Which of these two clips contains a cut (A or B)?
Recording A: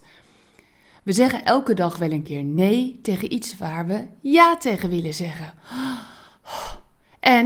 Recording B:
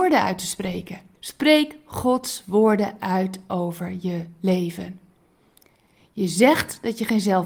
B